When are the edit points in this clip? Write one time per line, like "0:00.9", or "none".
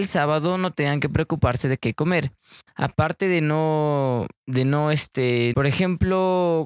0:02.7
0:04.4
0:05.5

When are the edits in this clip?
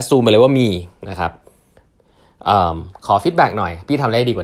none

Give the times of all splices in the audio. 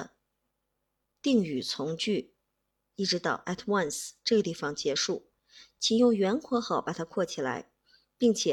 0:02.9

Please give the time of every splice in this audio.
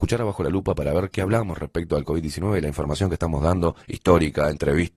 0:03.8

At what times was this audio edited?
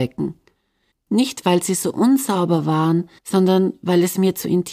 0:00.9
0:03.2

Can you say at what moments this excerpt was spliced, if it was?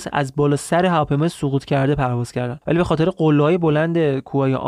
0:02.6

